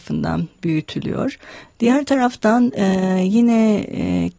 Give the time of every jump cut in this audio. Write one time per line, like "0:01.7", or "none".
0:01.7